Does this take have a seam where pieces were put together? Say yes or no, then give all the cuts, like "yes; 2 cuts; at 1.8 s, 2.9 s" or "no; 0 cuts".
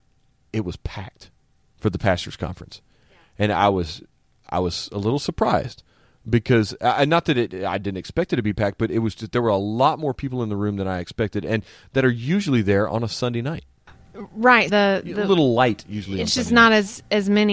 yes; 1 cut; at 14.7 s